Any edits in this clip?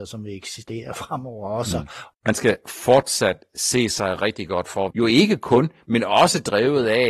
yes; 2 cuts; at 2.1 s, 4.9 s

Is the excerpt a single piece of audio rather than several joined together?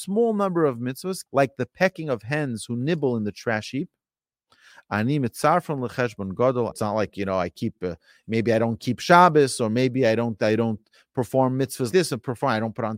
no; 3 cuts; at 1.3 s, 6.7 s, 11.9 s

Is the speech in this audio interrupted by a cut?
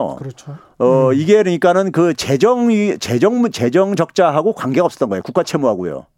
no; 0 cuts

